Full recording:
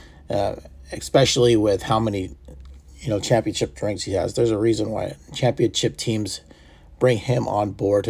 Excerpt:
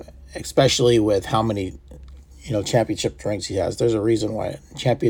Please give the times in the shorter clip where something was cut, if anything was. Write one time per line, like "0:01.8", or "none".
none